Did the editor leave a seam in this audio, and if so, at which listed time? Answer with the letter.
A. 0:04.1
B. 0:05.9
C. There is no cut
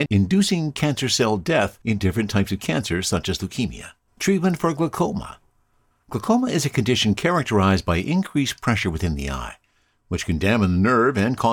A